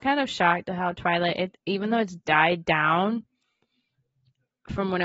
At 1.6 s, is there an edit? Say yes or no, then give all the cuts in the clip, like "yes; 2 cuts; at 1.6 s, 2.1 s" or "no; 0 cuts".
no; 0 cuts